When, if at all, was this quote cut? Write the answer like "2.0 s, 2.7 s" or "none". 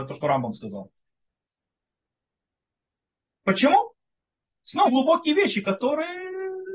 4.9 s